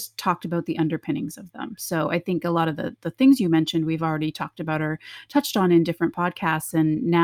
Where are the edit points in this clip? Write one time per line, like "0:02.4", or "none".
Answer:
none